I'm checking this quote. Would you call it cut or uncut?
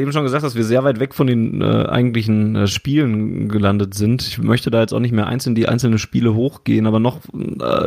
uncut